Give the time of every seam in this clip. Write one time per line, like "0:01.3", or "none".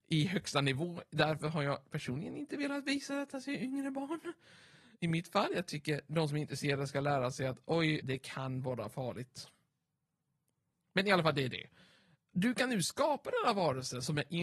0:08.0